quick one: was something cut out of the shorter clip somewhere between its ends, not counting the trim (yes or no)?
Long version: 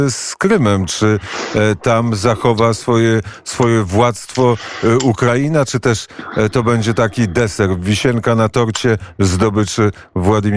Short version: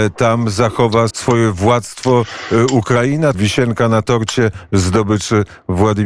yes